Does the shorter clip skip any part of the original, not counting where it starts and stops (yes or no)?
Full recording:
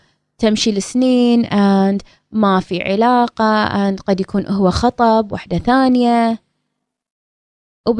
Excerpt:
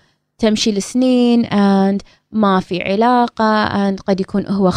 no